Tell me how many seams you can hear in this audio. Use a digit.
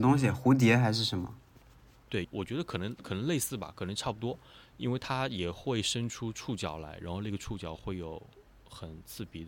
1